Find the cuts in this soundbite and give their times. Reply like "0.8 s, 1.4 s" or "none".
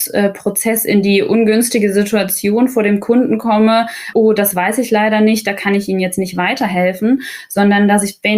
4.1 s